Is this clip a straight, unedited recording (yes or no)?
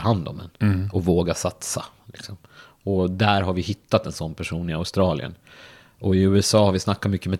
yes